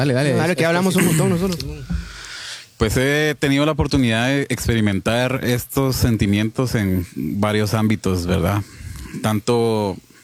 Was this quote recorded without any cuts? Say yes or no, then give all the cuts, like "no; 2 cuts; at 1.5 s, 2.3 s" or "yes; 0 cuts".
yes; 0 cuts